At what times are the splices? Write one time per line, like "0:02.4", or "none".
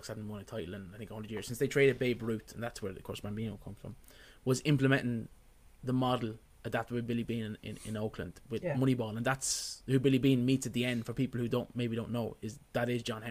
none

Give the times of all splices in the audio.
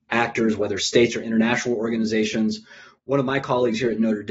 none

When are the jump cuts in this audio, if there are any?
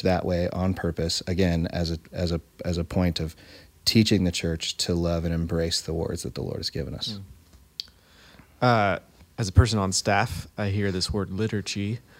none

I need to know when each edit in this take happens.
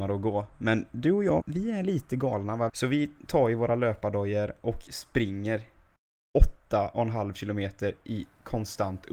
0:01.4
0:02.7

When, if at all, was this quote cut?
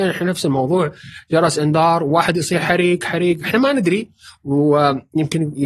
none

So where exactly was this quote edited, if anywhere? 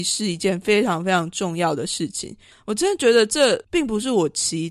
0:02.5

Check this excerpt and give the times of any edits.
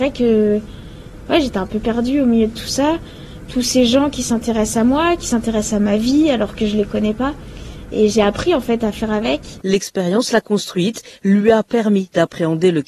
0:01.3
0:09.6

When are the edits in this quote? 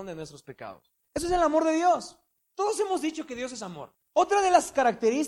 0:04.0

